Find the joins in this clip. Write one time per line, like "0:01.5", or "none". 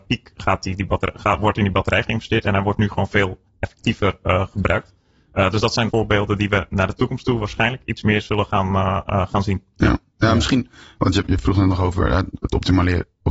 0:05.9